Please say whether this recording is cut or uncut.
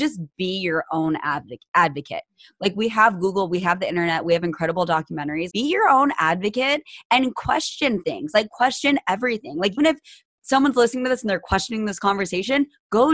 cut